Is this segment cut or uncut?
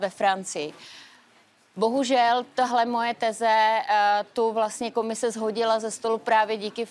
uncut